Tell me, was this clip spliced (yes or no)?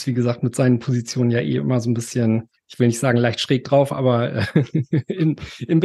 yes